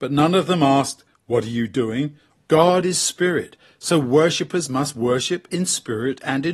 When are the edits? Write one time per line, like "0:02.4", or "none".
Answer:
0:02.3